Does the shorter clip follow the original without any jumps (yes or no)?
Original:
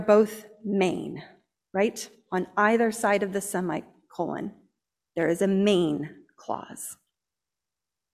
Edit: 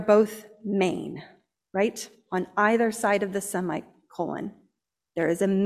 yes